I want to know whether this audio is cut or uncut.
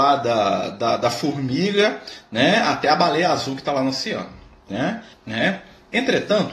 cut